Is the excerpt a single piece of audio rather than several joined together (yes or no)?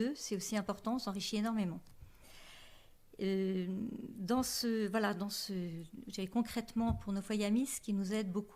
yes